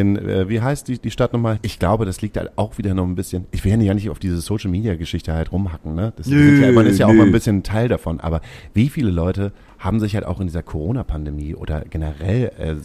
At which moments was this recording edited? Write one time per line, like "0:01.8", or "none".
0:01.6

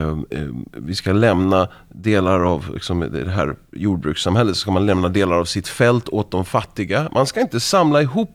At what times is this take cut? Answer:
none

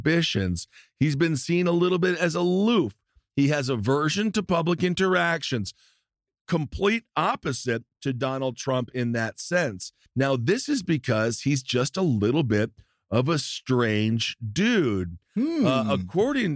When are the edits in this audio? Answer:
0:10.1

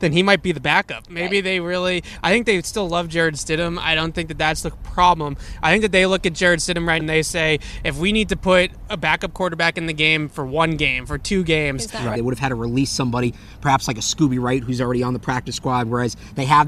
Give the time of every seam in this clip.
0:07.0
0:12.1

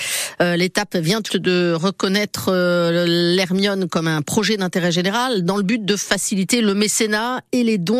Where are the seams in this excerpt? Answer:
0:01.3

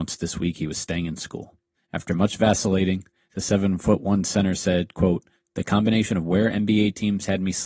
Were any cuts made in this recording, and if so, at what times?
none

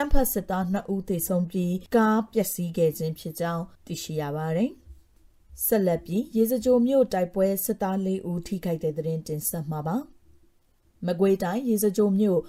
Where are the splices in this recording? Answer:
0:03.8

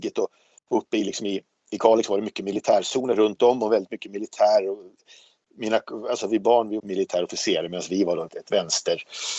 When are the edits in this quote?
0:06.8
0:08.3

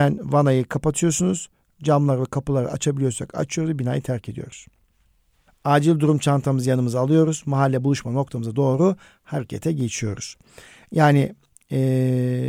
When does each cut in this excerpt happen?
0:01.7
0:05.5

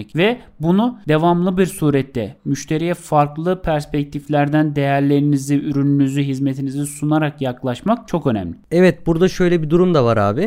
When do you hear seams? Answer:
none

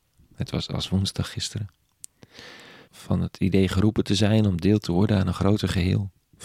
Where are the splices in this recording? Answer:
0:02.9

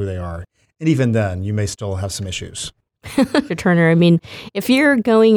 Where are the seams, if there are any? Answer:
0:03.5

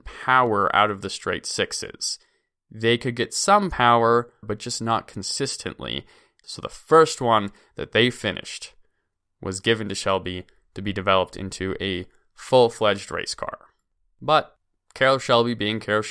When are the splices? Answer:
0:04.4
0:06.4

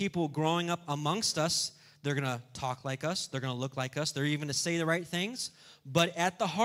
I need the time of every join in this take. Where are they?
none

